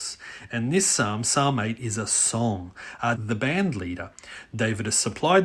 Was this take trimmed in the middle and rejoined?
yes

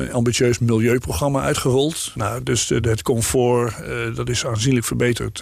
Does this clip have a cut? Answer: yes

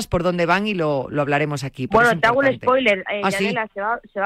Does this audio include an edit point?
no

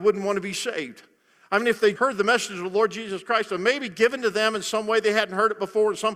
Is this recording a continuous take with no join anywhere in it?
no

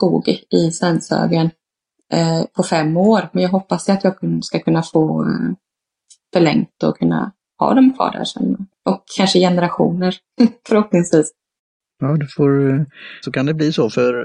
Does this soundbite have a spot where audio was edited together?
yes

